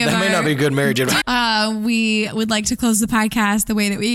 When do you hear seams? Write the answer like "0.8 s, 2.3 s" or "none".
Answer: 1.2 s